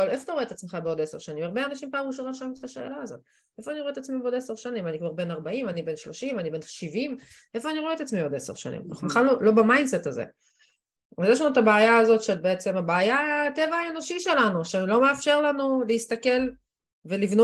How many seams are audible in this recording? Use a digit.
0